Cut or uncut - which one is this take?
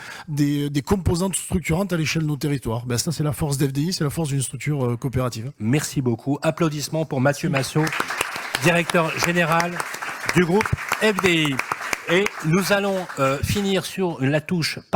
cut